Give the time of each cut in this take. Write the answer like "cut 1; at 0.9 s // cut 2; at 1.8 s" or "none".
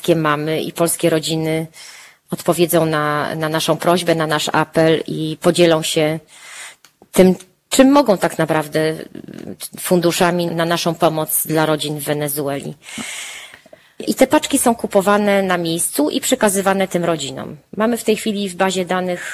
cut 1; at 10.5 s // cut 2; at 14.0 s